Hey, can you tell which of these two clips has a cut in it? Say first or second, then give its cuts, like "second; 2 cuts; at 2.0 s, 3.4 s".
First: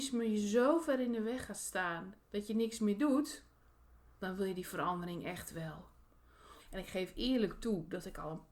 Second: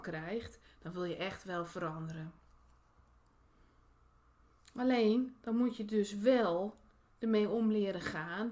first; 1 cut; at 6.6 s